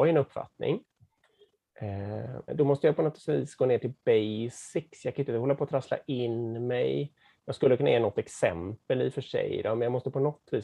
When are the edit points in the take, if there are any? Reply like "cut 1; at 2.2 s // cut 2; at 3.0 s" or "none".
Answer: cut 1; at 2.5 s